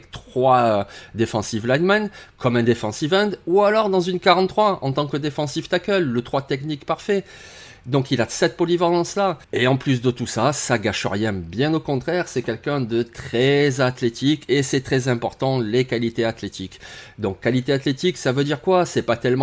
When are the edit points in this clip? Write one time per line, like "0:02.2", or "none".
0:09.4